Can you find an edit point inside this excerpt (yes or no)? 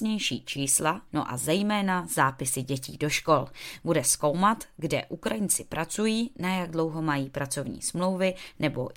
yes